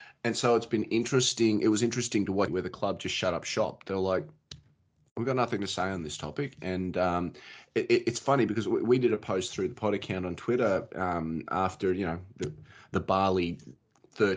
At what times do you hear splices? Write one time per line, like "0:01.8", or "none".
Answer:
0:02.5